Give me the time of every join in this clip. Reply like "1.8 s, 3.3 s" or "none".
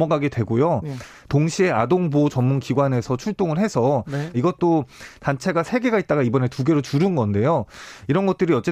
4.3 s